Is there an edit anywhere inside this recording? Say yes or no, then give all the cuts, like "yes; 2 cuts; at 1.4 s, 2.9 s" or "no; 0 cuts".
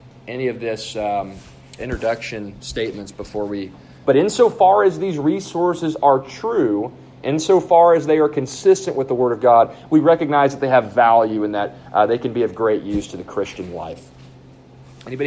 yes; 2 cuts; at 1.8 s, 4.0 s